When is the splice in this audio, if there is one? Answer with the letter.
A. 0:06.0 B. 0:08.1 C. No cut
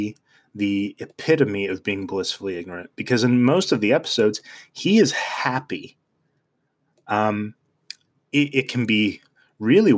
C